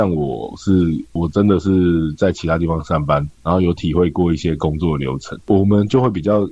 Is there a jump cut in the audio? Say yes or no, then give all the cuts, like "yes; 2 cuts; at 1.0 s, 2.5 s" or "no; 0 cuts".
yes; 1 cut; at 1.2 s